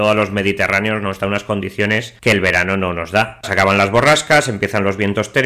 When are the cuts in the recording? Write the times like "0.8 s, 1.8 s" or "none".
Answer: 3.4 s